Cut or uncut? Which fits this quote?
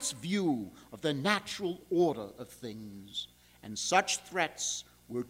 uncut